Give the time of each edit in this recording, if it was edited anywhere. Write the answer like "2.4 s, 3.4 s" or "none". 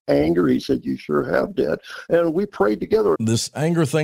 3.1 s